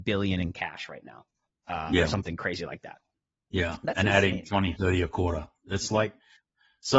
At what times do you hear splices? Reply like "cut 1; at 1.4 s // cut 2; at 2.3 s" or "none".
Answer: none